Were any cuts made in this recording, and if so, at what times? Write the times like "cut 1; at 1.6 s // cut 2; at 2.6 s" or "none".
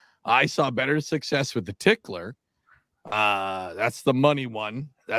none